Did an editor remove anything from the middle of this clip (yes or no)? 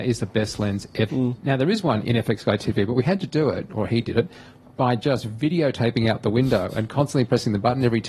yes